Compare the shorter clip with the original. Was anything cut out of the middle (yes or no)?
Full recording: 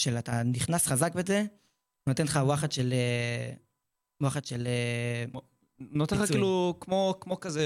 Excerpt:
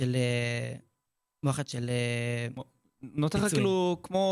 no